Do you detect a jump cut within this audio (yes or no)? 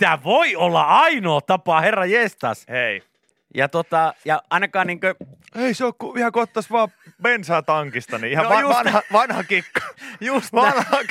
no